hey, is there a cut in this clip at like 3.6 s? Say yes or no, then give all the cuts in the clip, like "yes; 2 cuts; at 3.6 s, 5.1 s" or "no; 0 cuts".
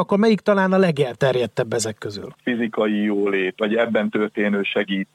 yes; 2 cuts; at 2.4 s, 3.6 s